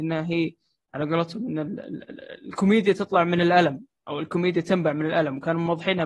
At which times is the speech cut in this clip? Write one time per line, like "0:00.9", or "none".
none